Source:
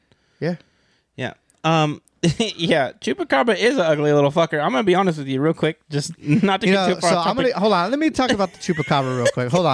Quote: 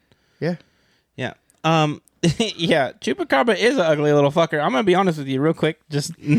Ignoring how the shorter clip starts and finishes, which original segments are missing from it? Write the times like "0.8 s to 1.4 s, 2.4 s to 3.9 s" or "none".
none